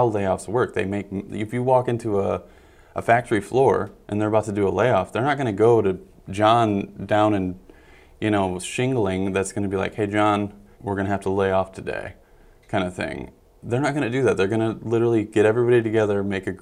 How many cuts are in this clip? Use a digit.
1